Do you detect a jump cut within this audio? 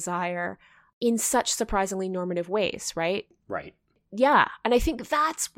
no; 0 cuts

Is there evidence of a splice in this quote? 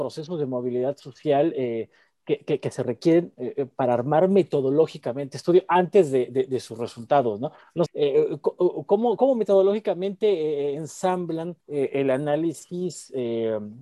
yes; 3 cuts; at 7.9 s, 9.2 s, 11.6 s

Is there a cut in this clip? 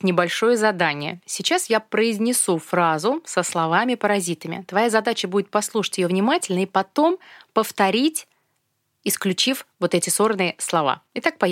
no; 0 cuts

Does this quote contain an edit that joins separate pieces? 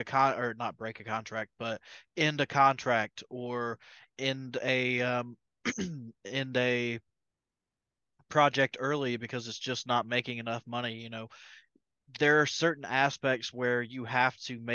no; 0 cuts

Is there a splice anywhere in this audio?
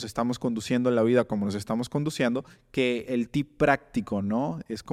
yes; 1 cut; at 3.1 s

